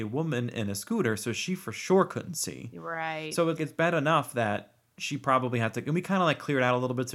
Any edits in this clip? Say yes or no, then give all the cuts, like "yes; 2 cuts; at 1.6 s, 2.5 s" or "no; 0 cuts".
yes; 1 cut; at 3.6 s